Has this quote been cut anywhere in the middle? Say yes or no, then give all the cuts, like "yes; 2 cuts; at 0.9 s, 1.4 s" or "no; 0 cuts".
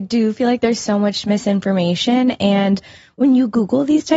no; 0 cuts